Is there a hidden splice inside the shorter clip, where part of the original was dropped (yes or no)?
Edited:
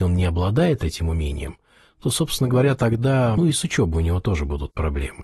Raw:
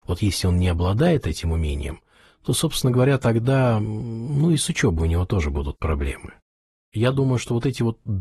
yes